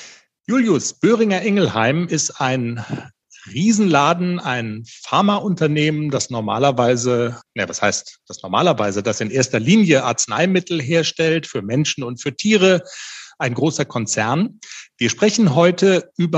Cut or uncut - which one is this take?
uncut